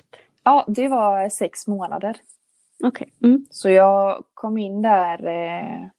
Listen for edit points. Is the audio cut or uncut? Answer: uncut